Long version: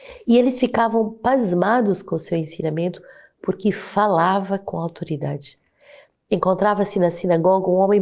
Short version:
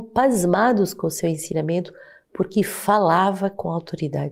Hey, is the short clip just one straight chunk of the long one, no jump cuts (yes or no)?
yes